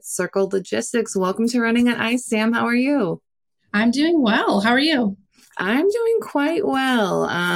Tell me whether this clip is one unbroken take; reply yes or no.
yes